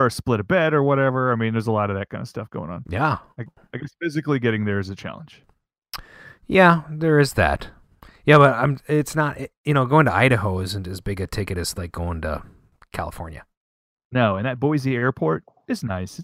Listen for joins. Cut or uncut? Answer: uncut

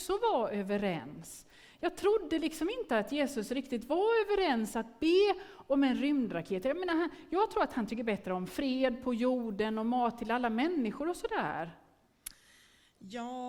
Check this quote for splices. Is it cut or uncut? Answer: uncut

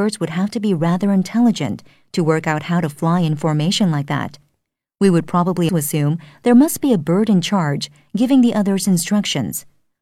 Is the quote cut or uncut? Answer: cut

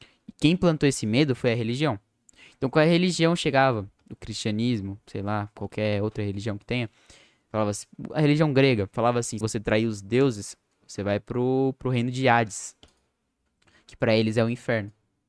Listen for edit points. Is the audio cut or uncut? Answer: cut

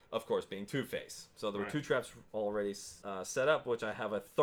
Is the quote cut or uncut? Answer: cut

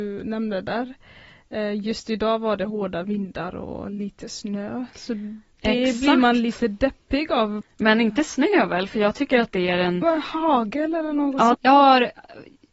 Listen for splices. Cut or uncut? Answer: cut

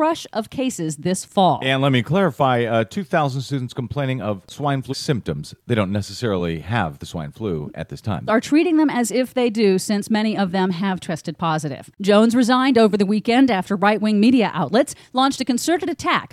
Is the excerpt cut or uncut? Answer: cut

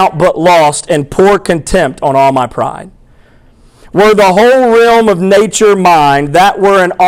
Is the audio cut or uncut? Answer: uncut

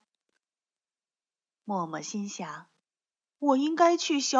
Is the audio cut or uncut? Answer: uncut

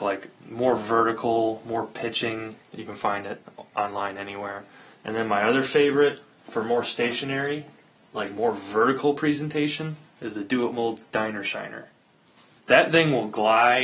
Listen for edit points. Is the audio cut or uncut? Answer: cut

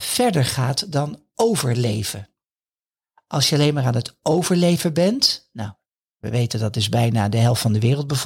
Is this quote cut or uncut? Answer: uncut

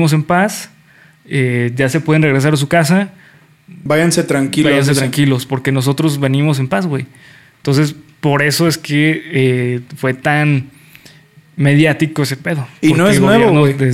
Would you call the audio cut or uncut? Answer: uncut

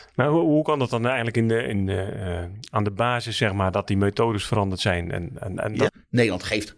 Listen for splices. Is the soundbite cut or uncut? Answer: cut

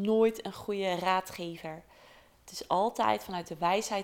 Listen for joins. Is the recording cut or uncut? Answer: uncut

